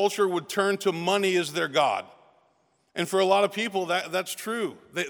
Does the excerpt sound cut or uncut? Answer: uncut